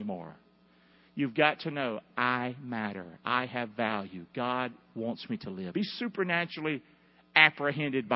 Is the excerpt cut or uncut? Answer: cut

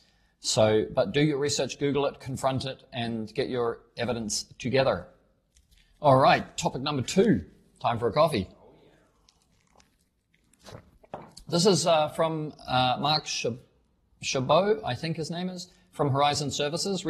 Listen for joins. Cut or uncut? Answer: uncut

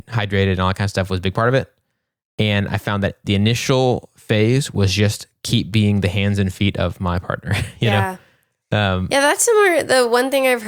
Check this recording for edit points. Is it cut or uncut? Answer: uncut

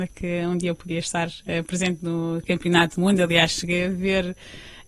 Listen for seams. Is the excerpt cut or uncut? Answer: uncut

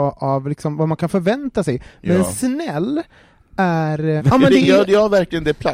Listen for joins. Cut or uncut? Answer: cut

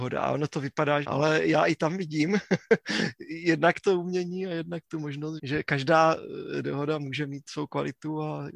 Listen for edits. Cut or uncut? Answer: cut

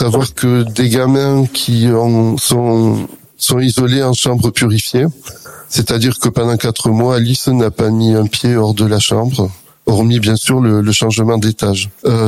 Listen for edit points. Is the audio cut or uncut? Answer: cut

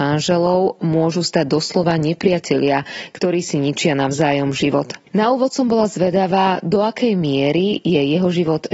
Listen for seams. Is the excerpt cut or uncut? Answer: cut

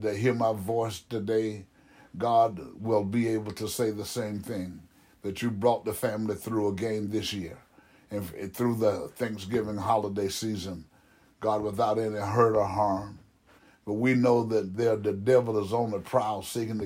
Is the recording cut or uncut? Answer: uncut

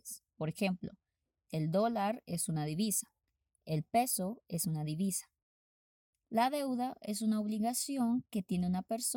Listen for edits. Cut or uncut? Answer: cut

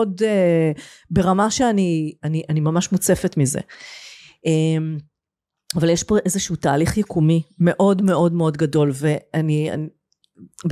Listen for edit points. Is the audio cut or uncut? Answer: uncut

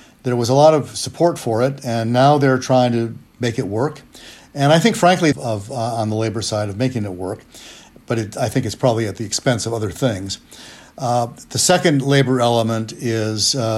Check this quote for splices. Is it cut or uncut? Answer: cut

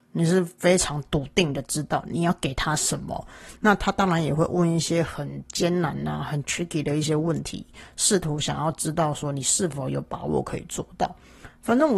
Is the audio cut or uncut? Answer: uncut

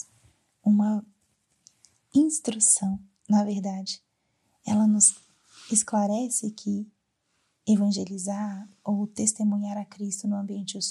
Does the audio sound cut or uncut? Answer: uncut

